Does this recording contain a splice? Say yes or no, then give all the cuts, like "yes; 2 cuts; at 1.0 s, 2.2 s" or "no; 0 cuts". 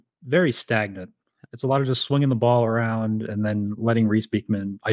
no; 0 cuts